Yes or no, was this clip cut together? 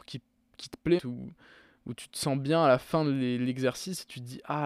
yes